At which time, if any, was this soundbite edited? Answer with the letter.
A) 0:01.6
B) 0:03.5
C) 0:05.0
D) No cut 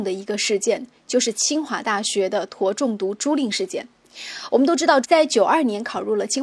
C